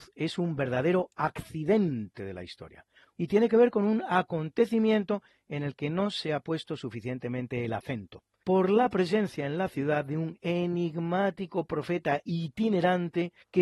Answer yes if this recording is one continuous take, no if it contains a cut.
no